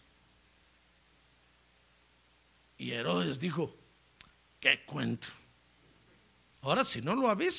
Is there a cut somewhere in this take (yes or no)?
yes